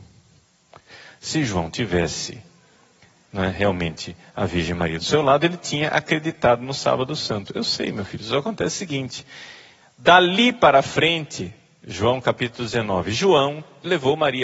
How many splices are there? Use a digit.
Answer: 0